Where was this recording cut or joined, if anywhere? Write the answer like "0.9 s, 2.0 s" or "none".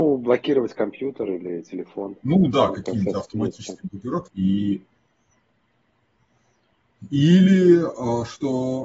4.3 s